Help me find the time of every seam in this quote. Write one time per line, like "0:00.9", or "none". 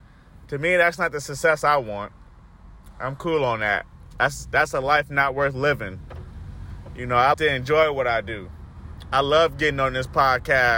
0:07.3